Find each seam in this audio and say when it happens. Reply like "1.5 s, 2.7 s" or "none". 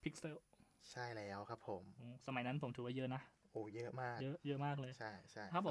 none